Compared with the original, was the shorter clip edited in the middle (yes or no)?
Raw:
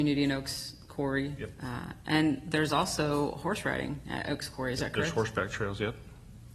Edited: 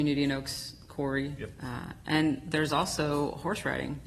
no